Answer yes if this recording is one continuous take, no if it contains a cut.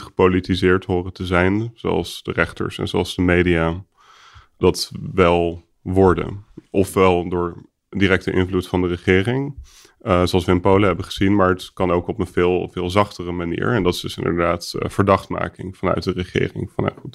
yes